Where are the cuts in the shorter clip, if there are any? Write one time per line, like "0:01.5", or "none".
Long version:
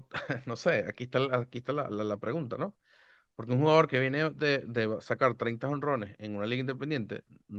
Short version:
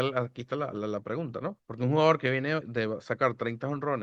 0:01.6
0:02.6